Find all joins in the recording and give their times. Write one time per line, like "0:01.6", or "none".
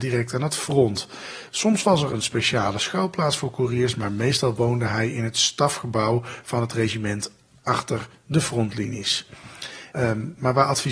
0:09.9